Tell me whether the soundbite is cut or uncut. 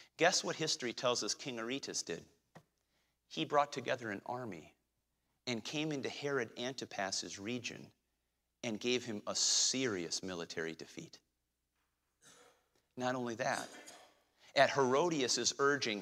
uncut